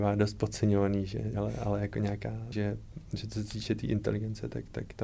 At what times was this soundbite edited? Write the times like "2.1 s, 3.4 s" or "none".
1.3 s, 2.5 s